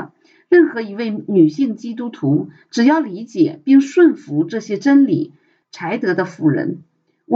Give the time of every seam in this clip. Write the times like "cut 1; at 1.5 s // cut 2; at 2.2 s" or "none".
cut 1; at 5.6 s